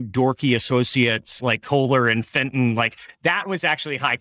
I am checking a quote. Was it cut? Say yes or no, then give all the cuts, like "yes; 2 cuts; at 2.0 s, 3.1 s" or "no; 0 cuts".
no; 0 cuts